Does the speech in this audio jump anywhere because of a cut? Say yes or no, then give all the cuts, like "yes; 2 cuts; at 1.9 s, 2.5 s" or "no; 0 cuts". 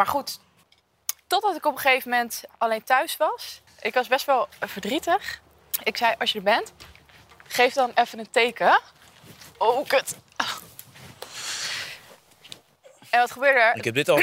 no; 0 cuts